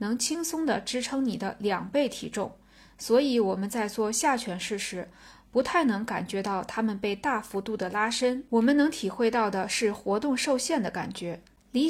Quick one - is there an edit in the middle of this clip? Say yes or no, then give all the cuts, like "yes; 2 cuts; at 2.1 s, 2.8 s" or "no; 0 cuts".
no; 0 cuts